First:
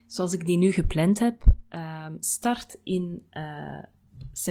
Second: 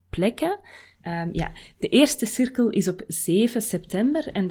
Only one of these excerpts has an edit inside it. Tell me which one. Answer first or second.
second